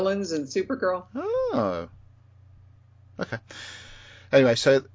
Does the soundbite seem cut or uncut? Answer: uncut